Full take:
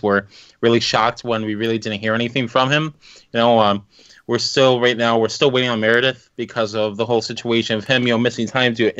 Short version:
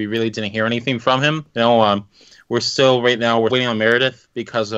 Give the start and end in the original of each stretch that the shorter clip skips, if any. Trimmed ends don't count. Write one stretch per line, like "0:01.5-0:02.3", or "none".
0:03.0-0:03.3
0:05.3-0:05.5